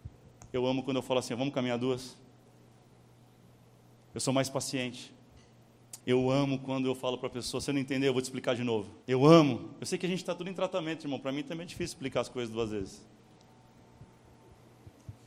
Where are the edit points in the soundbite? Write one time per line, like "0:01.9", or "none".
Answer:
0:06.0
0:09.0